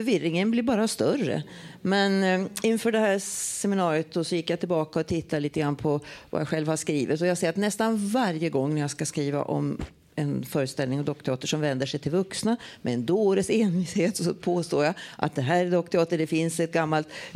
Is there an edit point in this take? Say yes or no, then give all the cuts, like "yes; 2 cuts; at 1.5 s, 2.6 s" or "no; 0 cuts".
no; 0 cuts